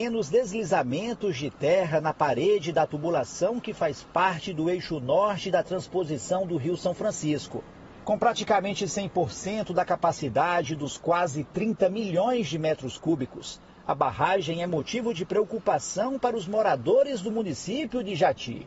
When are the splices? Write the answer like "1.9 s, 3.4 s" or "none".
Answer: 8.0 s